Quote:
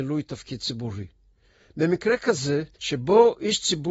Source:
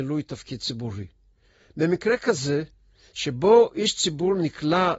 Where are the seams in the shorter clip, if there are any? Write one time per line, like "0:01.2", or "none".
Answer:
0:02.7